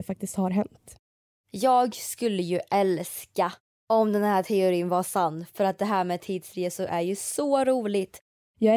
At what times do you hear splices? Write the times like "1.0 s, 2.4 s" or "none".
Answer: none